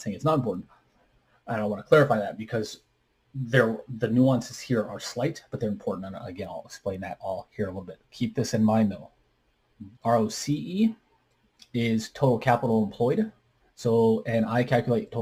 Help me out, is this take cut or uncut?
cut